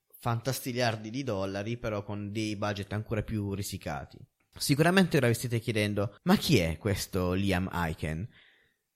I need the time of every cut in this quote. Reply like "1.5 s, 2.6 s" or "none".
4.4 s, 6.2 s